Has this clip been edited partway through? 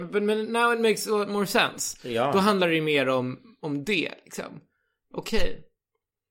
no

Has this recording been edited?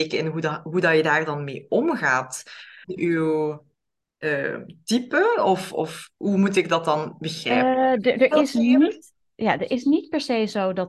yes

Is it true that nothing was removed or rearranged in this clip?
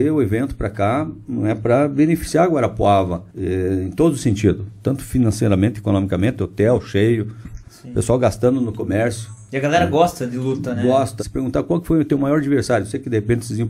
no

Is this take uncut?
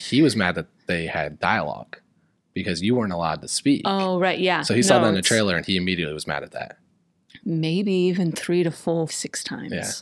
no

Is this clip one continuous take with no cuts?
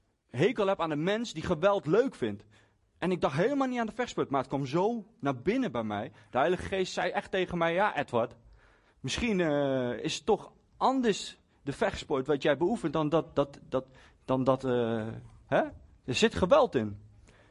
yes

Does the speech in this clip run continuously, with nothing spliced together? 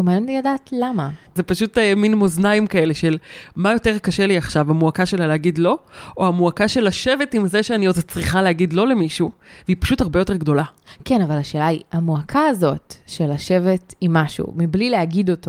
yes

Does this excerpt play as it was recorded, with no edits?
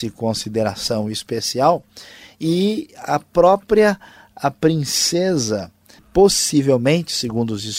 no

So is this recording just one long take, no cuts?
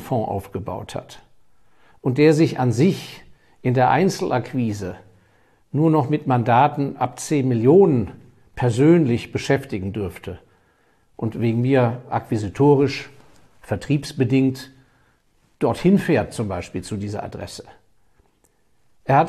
yes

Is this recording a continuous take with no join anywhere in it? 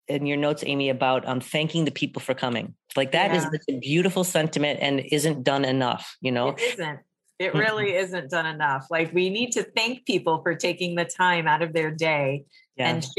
yes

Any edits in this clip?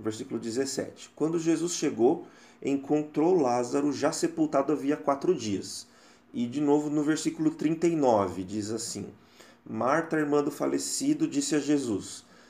no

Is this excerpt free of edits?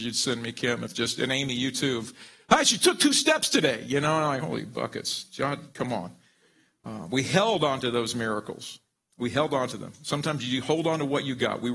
yes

